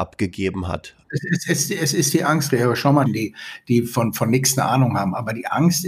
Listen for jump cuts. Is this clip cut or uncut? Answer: cut